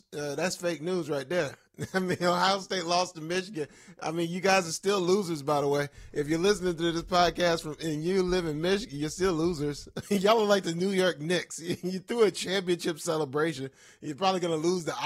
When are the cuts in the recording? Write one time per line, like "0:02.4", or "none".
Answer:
0:10.0